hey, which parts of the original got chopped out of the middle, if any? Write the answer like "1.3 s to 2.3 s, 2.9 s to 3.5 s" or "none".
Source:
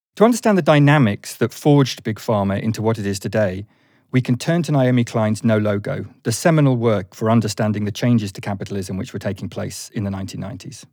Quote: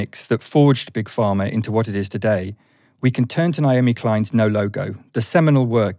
none